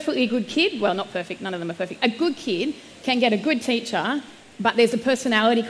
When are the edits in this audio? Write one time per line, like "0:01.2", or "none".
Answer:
none